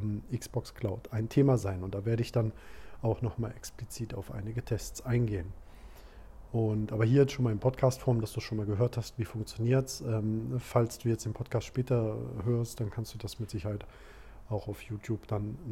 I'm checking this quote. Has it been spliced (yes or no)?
no